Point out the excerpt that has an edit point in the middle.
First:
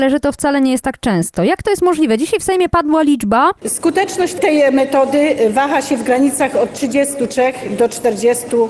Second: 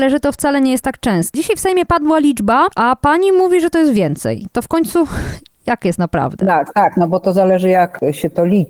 second; 2 cuts; at 1.3 s, 2.7 s

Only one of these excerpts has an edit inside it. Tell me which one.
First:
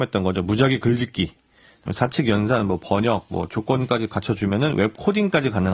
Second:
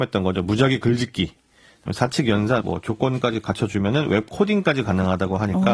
second; 1 cut; at 2.6 s

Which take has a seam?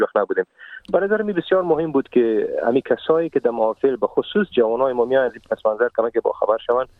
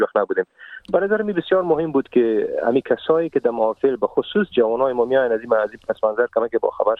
first; 1 cut; at 5.3 s

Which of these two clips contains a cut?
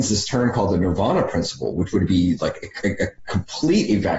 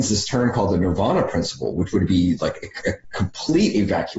second; 1 cut; at 2.8 s

